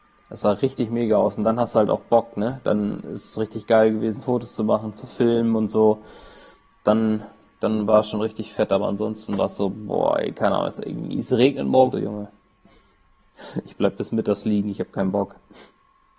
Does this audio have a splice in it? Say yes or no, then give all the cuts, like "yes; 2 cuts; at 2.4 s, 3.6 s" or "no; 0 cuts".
yes; 1 cut; at 11.9 s